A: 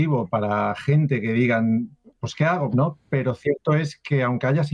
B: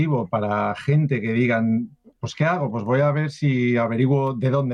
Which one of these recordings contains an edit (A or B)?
A